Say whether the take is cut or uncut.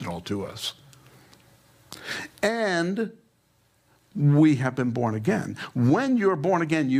uncut